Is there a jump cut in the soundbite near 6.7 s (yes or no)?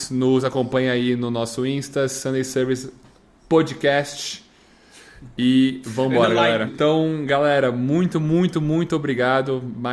yes